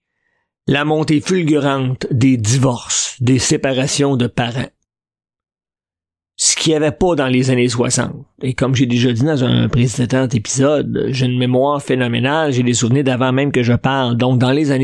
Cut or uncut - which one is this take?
uncut